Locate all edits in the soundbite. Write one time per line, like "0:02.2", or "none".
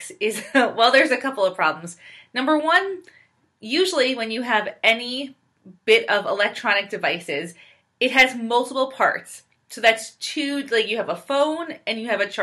none